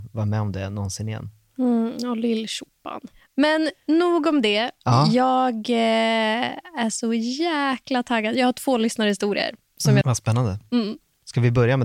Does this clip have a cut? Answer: yes; 1 cut; at 10.0 s

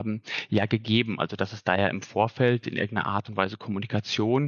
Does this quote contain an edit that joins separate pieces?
no; 0 cuts

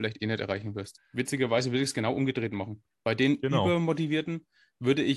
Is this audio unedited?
no; 1 cut; at 1.0 s

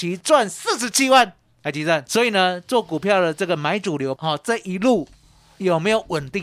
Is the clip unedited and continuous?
no; 2 cuts; at 2.1 s, 4.2 s

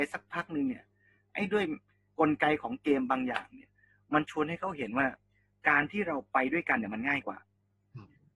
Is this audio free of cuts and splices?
yes; 0 cuts

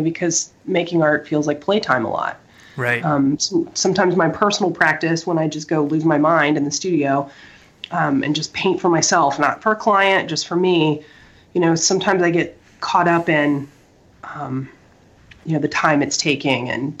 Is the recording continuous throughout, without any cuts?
yes; 0 cuts

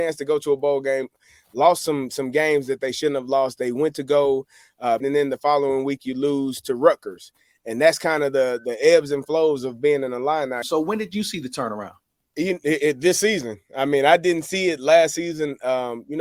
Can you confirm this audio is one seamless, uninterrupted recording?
no; 2 cuts; at 5.0 s, 10.6 s

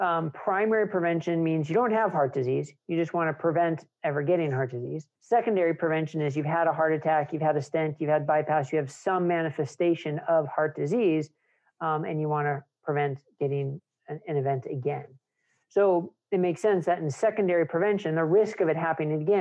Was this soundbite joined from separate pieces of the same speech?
yes; 1 cut; at 5.2 s

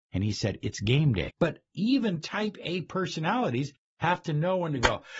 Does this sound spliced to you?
yes; 1 cut; at 1.3 s

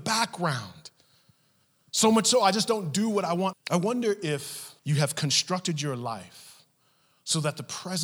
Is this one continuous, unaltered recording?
no; 2 cuts; at 3.5 s, 4.8 s

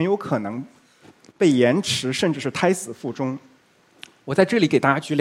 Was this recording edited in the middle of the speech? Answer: no; 0 cuts

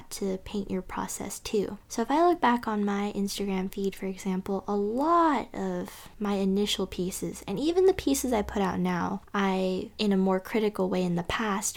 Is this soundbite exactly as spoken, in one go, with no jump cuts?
yes; 0 cuts

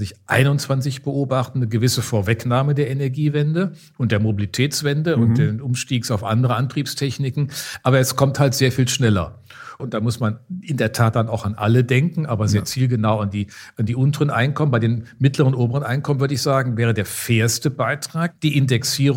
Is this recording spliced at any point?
yes; 1 cut; at 9.8 s

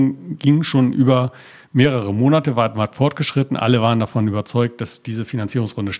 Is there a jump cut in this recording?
no; 0 cuts

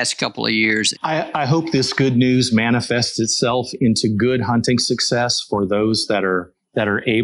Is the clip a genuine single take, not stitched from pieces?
no; 1 cut; at 0.9 s

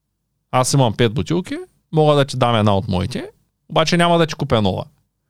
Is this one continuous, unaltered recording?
yes; 0 cuts

